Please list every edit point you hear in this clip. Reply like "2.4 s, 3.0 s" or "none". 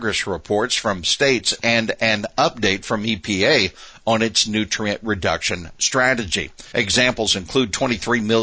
6.7 s